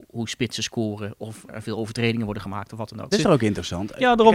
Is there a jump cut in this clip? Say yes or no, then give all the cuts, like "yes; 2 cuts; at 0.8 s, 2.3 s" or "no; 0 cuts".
yes; 2 cuts; at 1.5 s, 3.1 s